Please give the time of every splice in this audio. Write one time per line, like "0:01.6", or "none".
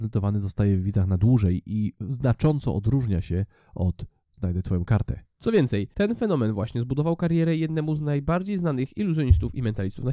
0:05.4

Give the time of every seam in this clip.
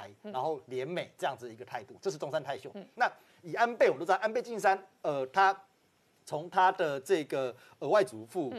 0:02.9

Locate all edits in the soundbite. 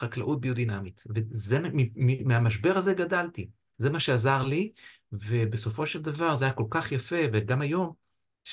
0:03.7

